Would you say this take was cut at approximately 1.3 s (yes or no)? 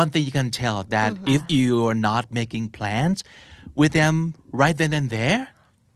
yes